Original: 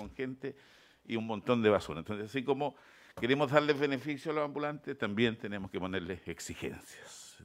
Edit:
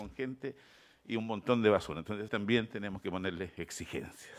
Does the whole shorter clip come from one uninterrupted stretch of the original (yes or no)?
no